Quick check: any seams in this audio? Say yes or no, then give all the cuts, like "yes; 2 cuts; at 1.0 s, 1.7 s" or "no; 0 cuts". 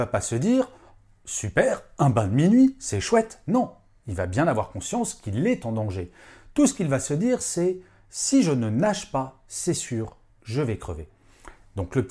no; 0 cuts